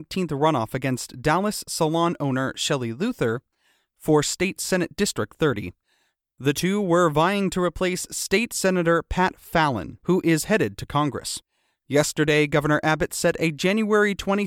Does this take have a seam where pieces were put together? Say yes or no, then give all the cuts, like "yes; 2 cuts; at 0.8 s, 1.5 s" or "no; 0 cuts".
no; 0 cuts